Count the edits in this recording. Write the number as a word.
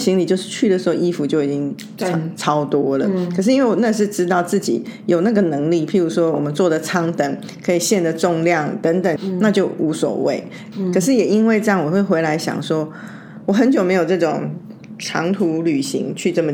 two